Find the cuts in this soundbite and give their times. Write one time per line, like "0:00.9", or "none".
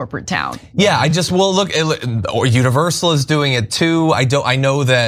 none